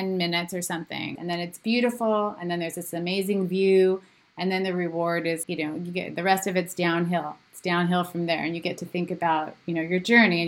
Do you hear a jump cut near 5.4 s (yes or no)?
yes